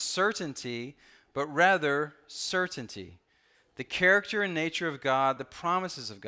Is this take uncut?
no; 1 cut; at 5.4 s

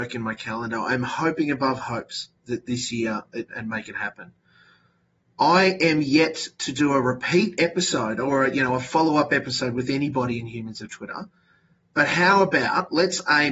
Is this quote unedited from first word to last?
no; 1 cut; at 3.5 s

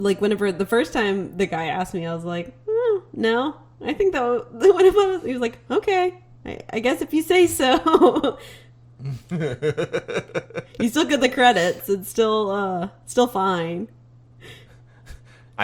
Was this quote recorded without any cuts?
no; 1 cut; at 14.4 s

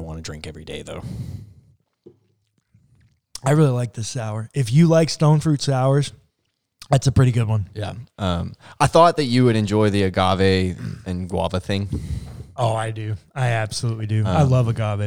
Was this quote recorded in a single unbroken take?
yes; 0 cuts

